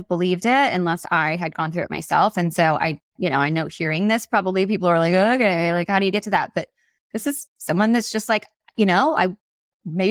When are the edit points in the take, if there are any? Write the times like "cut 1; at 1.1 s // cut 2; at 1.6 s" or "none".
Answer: none